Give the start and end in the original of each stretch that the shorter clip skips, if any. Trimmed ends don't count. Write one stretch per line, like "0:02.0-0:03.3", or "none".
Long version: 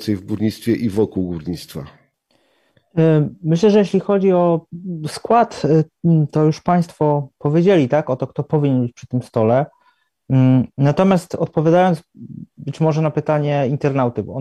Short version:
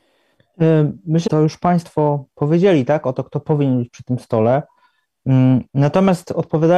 0:03.6-0:06.3